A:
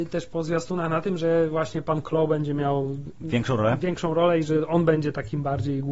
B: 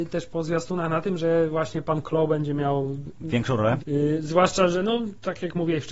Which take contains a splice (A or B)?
B